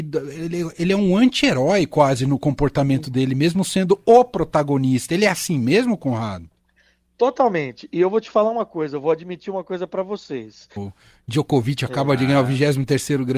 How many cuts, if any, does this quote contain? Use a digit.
1